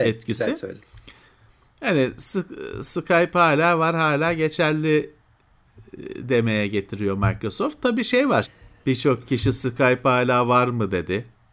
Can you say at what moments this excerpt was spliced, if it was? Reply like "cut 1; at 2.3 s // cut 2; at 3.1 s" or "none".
cut 1; at 8.4 s